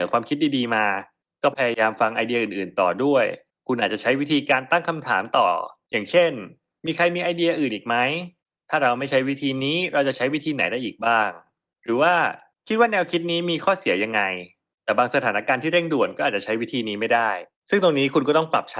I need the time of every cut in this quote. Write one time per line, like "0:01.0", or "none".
none

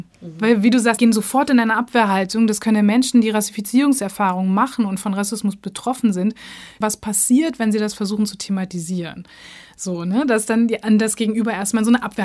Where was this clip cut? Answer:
0:01.0
0:06.8

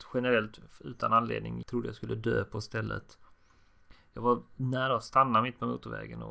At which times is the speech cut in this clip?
0:01.6

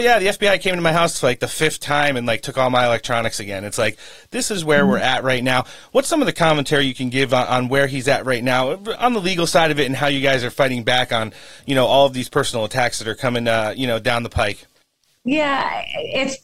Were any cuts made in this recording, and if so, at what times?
none

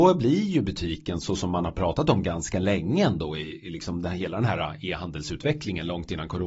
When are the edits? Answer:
none

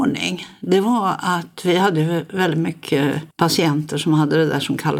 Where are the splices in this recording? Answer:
0:03.3

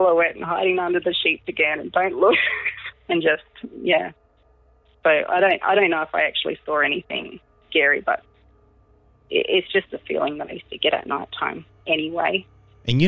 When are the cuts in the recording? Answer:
0:02.9

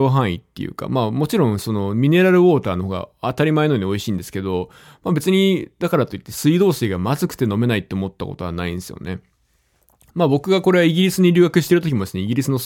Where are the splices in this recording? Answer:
none

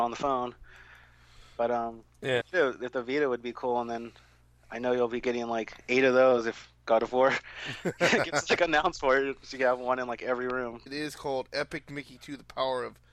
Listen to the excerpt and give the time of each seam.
0:02.4
0:10.9

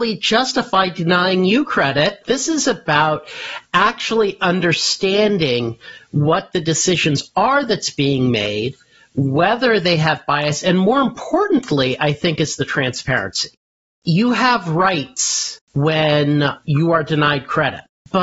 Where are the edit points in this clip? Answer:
0:02.2
0:14.0
0:15.6

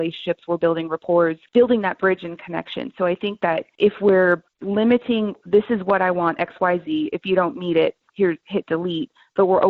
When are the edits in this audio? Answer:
none

